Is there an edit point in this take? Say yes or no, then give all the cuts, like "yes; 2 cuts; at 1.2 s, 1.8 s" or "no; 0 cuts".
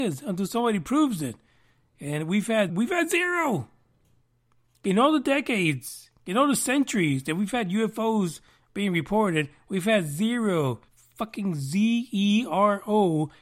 yes; 2 cuts; at 2.7 s, 10.9 s